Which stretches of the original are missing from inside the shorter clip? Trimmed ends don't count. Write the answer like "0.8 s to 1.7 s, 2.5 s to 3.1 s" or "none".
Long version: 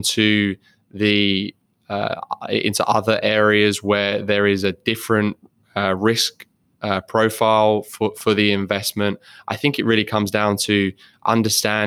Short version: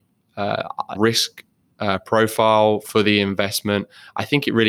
2.5 s to 6.0 s, 7.8 s to 8.1 s